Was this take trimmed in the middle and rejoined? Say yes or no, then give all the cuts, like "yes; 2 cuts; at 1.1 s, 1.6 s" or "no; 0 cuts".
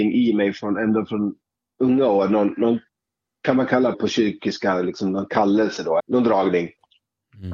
yes; 2 cuts; at 3.9 s, 6.0 s